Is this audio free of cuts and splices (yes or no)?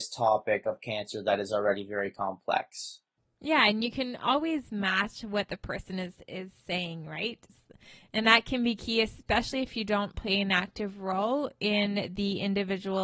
yes